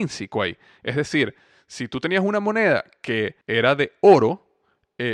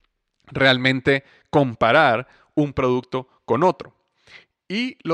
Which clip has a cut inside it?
first; 1 cut; at 3.4 s

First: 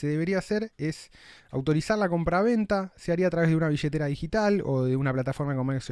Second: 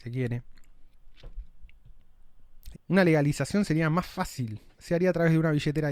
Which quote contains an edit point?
second; 2 cuts; at 2.7 s, 4.8 s

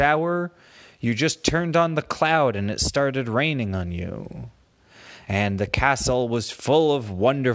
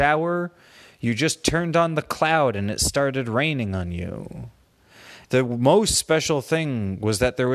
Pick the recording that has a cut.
second; 1 cut; at 5.2 s

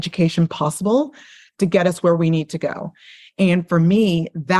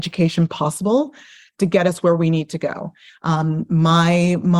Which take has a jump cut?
second; 1 cut; at 3.1 s

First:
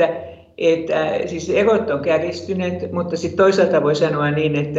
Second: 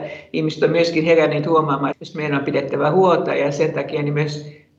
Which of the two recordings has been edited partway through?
second; 1 cut; at 1.9 s

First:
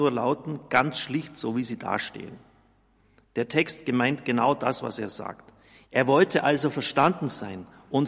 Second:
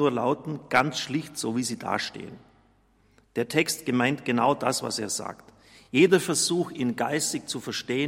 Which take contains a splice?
first; 1 cut; at 5.8 s

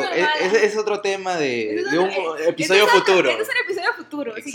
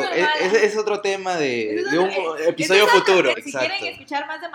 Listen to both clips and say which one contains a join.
second; 1 cut; at 3.3 s

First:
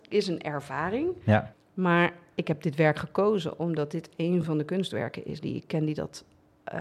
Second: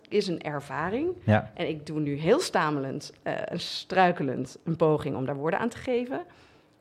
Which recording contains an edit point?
first; 1 cut; at 1.5 s

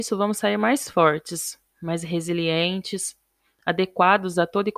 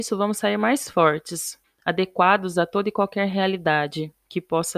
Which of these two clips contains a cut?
second; 1 cut; at 1.6 s

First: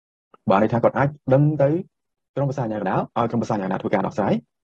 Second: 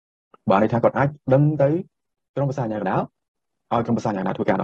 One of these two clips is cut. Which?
first; 1 cut; at 3.1 s

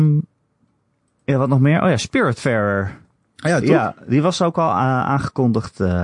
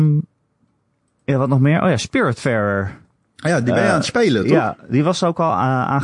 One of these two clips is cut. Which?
first; 1 cut; at 3.6 s

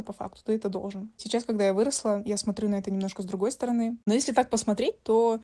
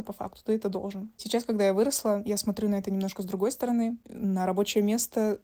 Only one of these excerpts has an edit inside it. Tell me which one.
second; 1 cut; at 4.0 s

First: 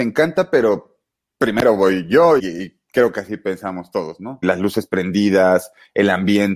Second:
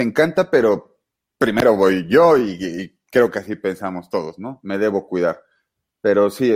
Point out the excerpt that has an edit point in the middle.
first; 2 cuts; at 2.4 s, 4.4 s

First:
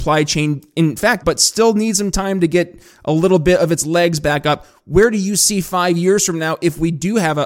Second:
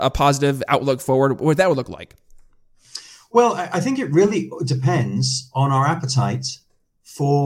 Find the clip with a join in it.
first; 1 cut; at 1.2 s

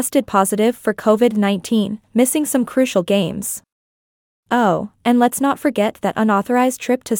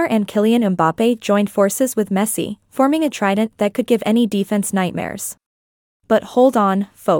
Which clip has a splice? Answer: second; 1 cut; at 6.0 s

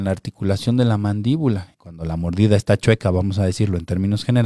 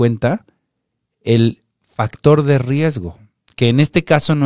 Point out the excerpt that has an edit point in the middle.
first; 1 cut; at 1.7 s

